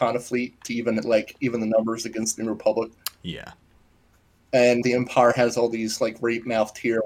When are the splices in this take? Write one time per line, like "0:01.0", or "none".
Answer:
0:04.8